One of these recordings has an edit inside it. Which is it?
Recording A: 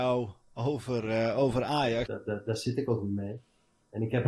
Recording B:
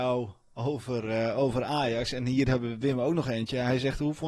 A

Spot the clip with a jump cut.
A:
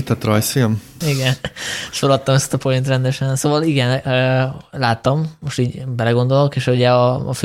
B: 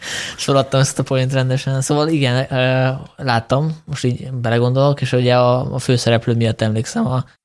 A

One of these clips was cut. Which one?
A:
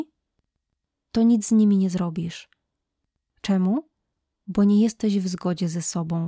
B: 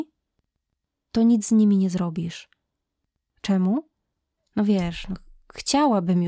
B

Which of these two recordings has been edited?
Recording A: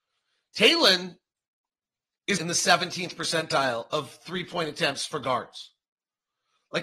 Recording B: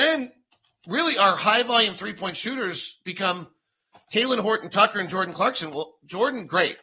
A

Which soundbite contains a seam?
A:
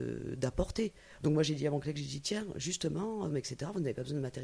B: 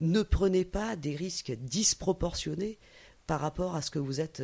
A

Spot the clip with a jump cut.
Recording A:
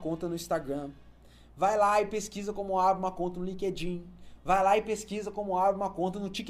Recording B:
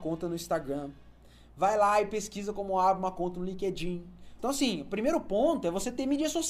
B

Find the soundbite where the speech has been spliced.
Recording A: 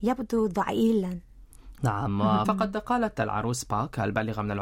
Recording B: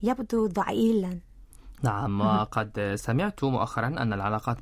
A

